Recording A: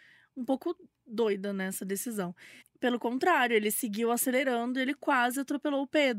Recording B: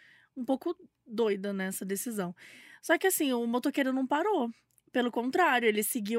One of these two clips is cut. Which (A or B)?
A